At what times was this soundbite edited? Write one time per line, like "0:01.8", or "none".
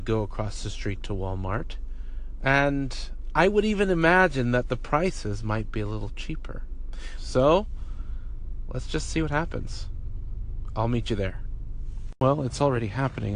0:07.2

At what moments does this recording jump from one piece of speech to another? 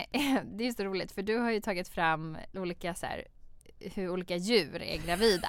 0:02.5

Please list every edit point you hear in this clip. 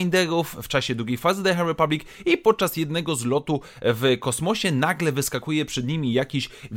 none

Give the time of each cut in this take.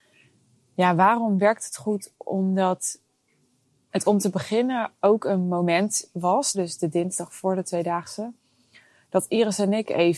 0:06.5

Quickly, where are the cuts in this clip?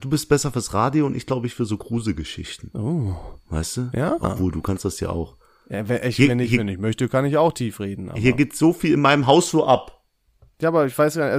none

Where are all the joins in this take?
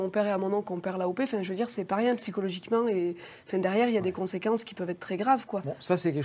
none

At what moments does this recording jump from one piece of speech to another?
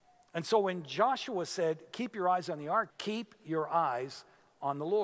0:02.9

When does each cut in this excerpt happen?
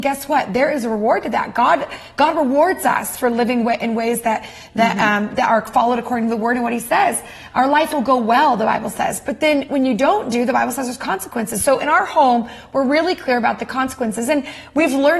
none

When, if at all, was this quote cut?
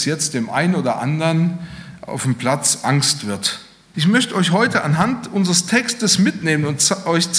0:03.9

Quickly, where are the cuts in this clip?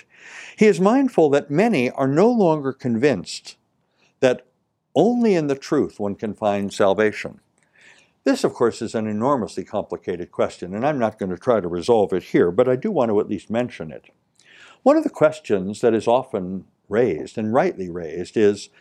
none

